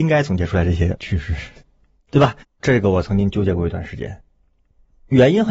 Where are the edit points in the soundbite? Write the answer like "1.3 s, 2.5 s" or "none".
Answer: 2.4 s